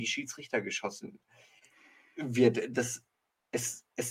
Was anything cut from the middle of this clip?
no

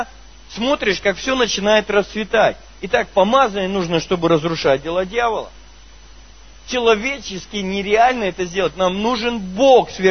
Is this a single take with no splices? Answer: yes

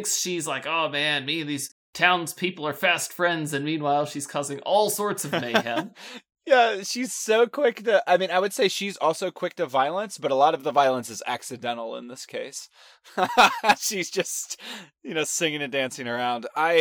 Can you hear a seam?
no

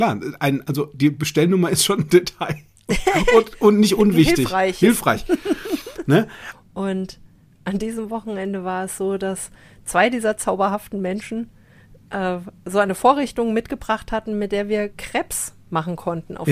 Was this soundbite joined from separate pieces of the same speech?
yes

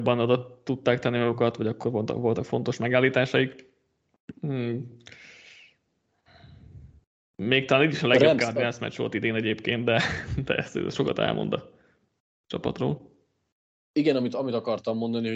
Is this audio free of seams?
yes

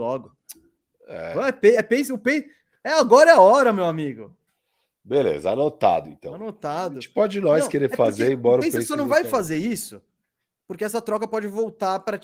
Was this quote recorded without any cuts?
yes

